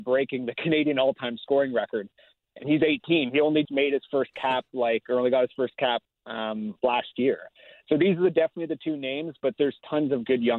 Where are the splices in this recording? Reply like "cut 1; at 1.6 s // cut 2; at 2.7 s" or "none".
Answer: cut 1; at 3.7 s